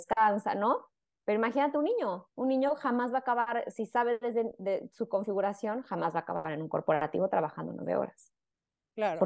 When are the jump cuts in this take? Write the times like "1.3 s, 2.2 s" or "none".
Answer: none